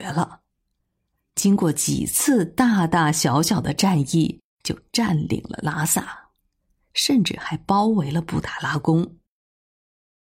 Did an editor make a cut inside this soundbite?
no; 0 cuts

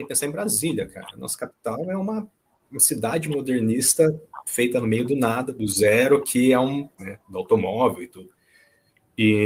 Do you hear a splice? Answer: yes; 1 cut; at 7.0 s

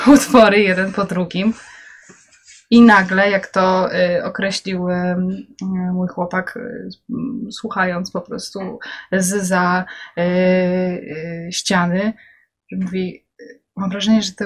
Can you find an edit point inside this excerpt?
no; 0 cuts

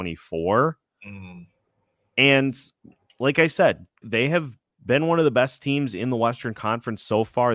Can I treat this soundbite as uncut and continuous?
no; 1 cut; at 4.0 s

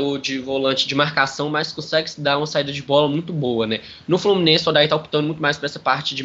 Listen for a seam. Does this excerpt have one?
no; 0 cuts

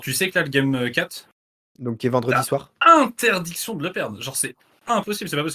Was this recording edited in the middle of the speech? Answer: no; 0 cuts

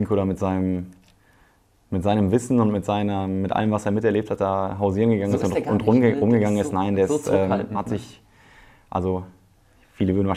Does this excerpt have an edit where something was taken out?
no; 0 cuts

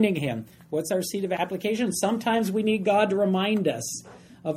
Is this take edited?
no; 0 cuts

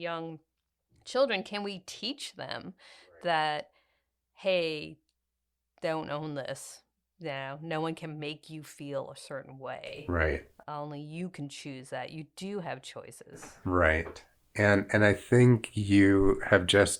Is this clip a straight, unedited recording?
yes; 0 cuts

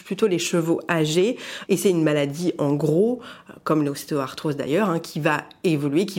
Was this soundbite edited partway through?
yes; 1 cut; at 1.6 s

